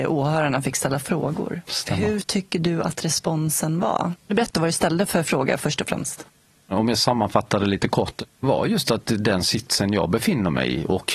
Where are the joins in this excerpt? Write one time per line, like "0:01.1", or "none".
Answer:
none